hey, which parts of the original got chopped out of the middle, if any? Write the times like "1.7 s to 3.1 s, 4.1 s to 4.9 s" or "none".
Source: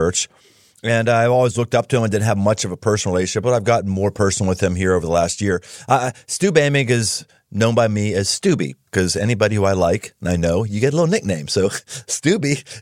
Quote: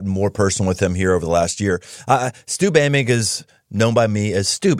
none